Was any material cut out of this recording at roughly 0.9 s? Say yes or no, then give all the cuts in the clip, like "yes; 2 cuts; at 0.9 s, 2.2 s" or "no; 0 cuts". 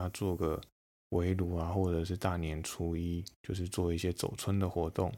no; 1 cut; at 3.3 s